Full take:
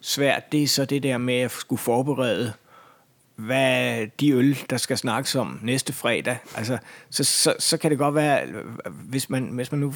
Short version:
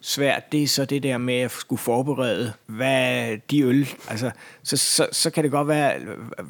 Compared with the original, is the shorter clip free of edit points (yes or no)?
no